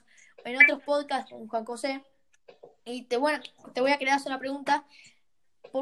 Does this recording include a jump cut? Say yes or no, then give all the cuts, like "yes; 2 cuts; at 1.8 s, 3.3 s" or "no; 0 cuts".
no; 0 cuts